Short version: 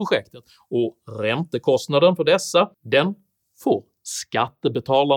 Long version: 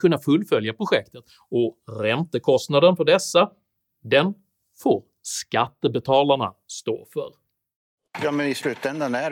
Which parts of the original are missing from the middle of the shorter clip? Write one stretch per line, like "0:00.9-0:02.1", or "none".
0:03.5-0:03.9